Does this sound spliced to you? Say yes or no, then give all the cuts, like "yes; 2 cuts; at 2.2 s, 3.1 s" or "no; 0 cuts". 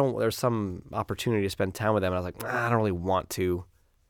no; 0 cuts